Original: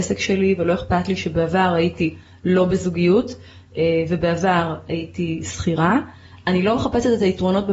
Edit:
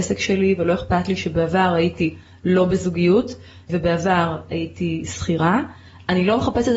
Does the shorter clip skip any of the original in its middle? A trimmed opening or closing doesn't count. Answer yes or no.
yes